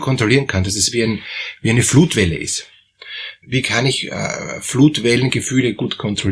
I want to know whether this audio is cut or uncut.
uncut